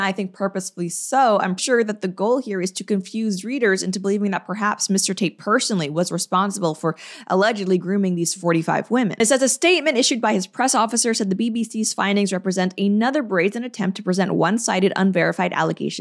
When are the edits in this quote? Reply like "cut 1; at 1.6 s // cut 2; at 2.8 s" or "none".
cut 1; at 1.6 s

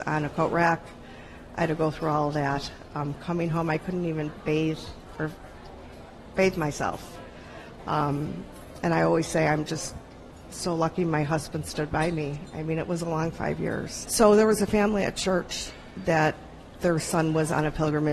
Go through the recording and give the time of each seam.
cut 1; at 14.0 s // cut 2; at 16.8 s

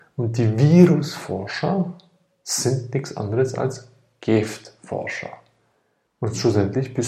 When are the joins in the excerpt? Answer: cut 1; at 6.0 s

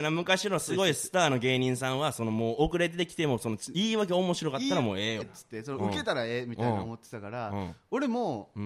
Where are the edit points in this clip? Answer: cut 1; at 5.2 s

